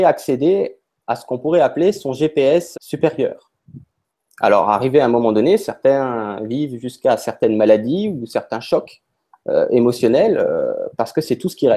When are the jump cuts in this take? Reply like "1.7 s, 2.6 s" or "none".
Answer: 2.7 s, 4.2 s